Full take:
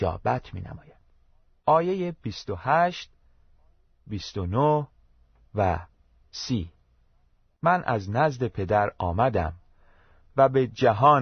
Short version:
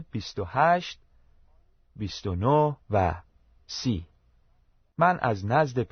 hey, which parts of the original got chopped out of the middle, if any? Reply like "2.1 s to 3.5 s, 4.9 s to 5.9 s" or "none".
4.9 s to 5.5 s